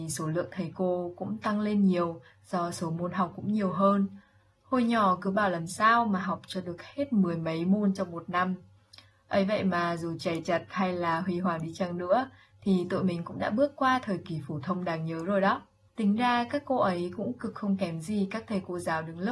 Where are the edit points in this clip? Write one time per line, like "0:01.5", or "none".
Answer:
0:15.9